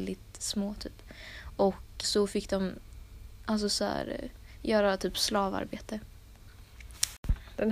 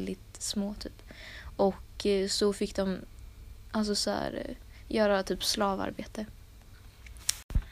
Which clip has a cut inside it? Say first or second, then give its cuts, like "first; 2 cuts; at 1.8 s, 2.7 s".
first; 1 cut; at 2.0 s